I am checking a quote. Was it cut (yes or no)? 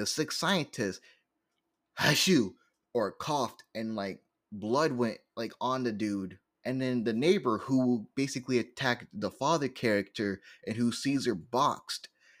yes